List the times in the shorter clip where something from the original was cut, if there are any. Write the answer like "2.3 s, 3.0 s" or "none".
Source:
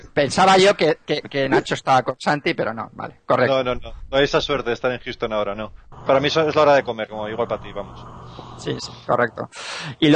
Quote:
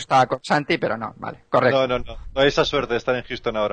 none